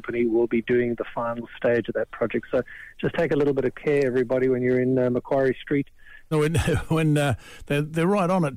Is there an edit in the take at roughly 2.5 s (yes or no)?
no